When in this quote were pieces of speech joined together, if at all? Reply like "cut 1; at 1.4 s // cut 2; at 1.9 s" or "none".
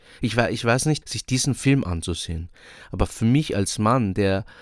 cut 1; at 1.0 s